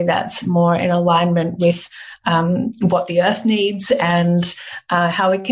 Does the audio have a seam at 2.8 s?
no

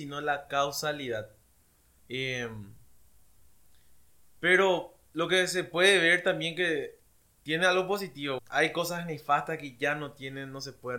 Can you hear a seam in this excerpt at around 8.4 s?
yes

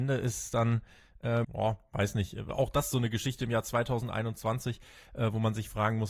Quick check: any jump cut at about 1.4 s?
yes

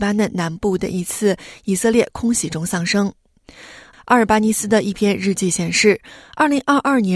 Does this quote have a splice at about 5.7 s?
no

